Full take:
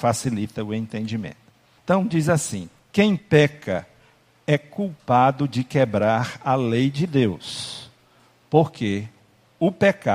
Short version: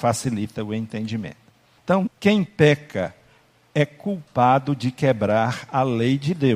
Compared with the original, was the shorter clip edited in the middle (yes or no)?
yes